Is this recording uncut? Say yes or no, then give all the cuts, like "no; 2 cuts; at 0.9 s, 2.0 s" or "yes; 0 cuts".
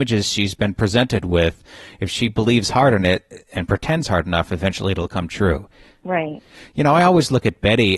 yes; 0 cuts